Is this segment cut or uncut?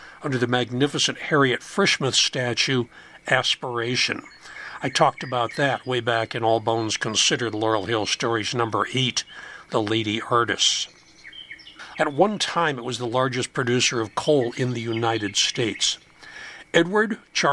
cut